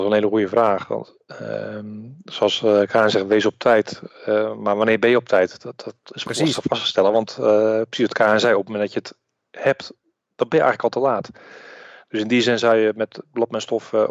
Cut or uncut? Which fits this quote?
uncut